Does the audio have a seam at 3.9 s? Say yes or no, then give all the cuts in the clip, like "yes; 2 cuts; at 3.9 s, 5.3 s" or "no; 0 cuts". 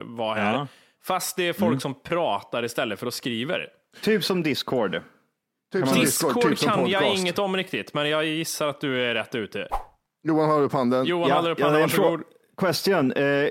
yes; 1 cut; at 3.9 s